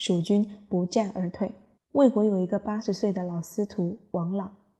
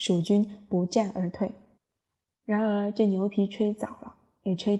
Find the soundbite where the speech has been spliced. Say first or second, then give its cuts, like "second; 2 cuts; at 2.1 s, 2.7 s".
first; 1 cut; at 1.8 s